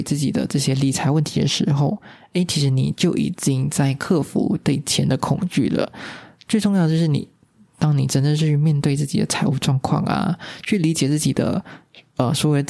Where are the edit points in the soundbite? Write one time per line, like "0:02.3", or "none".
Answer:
none

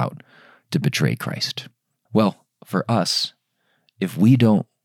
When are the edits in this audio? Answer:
0:02.1

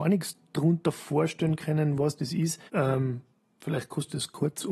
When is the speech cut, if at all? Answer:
0:02.7

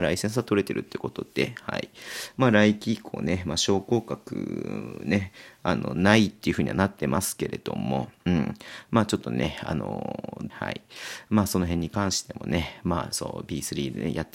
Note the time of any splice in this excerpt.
0:10.5

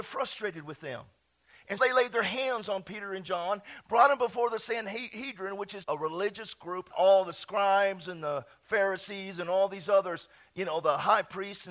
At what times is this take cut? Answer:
0:01.8
0:05.8
0:06.9

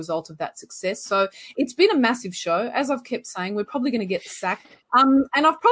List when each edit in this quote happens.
none

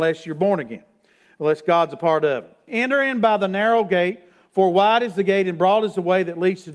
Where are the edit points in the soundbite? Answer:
0:02.7

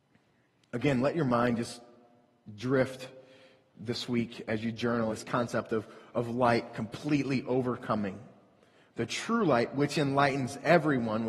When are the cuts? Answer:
0:05.1

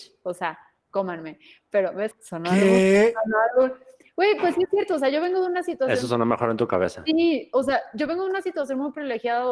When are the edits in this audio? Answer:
0:02.1

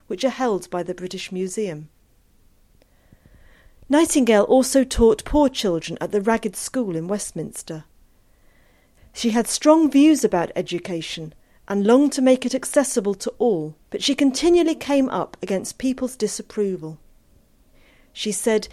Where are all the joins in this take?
0:09.0
0:13.8

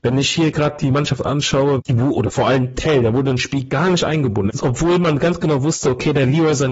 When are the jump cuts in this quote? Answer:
0:01.8
0:04.5

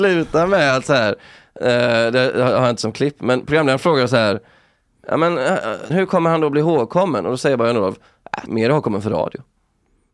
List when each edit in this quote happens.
0:05.9
0:08.5

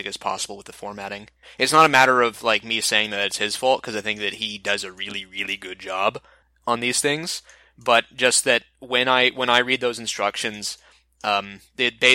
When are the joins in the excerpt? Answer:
none

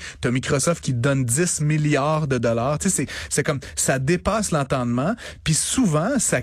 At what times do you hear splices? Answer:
none

